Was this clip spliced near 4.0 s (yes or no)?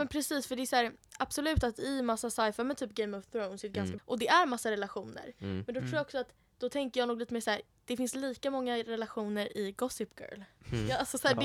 yes